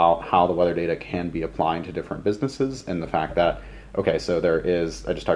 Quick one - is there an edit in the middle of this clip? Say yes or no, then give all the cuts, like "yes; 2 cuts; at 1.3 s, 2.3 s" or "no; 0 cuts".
no; 0 cuts